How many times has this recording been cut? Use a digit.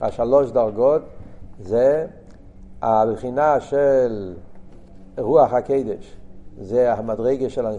0